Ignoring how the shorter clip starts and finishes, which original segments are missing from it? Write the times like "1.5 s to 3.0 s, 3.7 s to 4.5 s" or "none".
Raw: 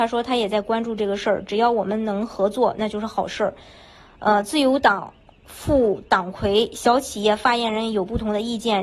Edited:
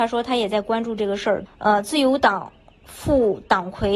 1.5 s to 4.1 s